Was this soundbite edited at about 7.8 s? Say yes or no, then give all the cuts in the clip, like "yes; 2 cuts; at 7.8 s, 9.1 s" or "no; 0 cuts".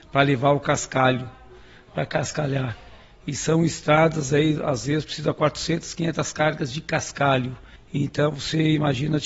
yes; 1 cut; at 7.8 s